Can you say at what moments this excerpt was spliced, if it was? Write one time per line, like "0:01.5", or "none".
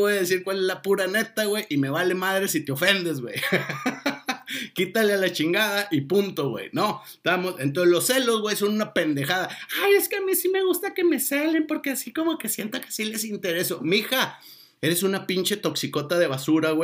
none